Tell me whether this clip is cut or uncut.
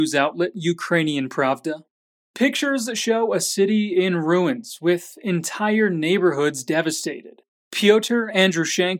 cut